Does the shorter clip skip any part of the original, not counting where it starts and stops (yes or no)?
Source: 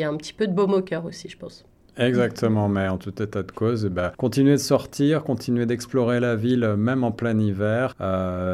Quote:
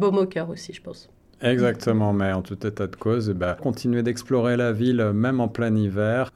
yes